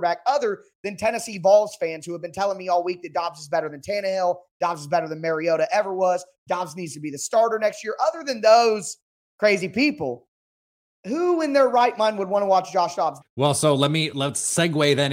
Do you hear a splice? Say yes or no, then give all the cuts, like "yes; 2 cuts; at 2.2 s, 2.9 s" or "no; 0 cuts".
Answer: yes; 1 cut; at 13.2 s